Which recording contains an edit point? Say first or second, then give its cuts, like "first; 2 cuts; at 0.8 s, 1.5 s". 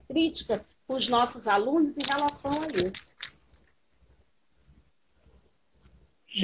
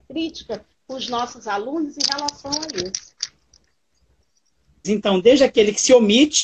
second; 1 cut; at 4.8 s